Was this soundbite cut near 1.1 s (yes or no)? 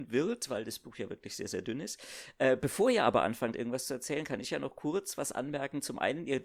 no